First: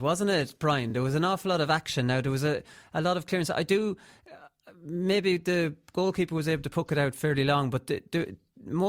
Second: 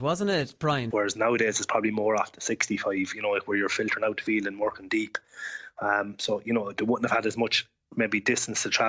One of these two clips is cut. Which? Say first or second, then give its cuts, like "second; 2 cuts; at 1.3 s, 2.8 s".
second; 1 cut; at 0.9 s